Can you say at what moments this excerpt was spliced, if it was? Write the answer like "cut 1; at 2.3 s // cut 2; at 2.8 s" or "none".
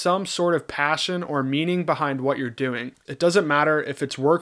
cut 1; at 3.1 s